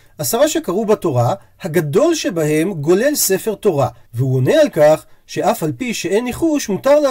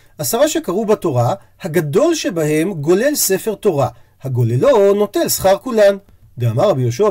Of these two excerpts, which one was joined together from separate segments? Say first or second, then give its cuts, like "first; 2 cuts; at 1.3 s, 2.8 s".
first; 1 cut; at 4.0 s